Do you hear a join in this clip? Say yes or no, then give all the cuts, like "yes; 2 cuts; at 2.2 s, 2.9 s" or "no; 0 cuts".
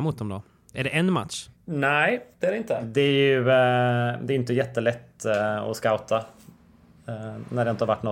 yes; 1 cut; at 2.8 s